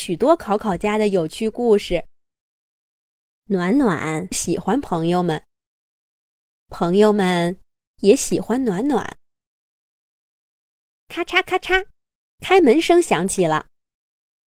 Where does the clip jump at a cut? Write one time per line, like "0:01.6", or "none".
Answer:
0:12.2